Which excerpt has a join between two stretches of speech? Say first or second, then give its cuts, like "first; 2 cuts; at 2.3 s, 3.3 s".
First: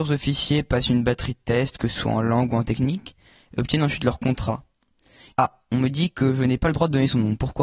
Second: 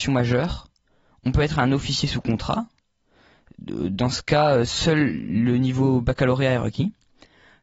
first; 1 cut; at 5.3 s